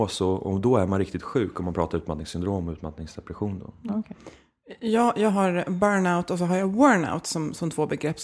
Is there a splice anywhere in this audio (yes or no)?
no